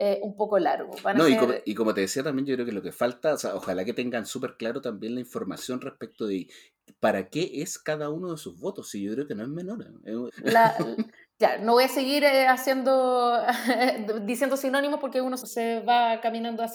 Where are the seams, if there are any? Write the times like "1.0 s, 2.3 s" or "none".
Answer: 10.3 s, 15.4 s